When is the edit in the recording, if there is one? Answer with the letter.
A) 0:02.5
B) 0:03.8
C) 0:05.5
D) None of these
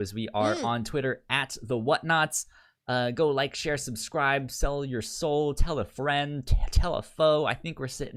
D